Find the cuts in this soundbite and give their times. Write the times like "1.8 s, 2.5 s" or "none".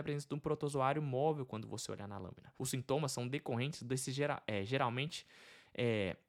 2.6 s